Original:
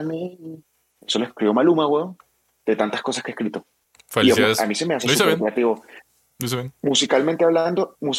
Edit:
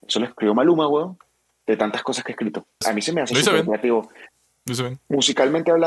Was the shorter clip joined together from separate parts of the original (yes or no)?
yes